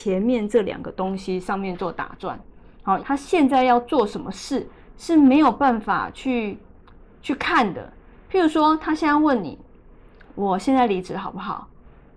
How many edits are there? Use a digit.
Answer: 1